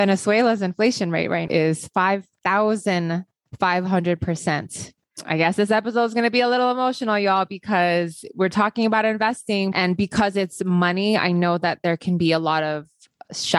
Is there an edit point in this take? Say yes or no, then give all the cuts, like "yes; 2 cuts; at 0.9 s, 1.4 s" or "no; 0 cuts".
yes; 1 cut; at 1.5 s